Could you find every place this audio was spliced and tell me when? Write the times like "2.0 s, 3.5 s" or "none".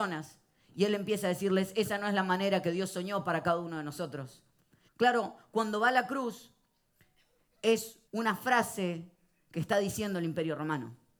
4.9 s, 8.1 s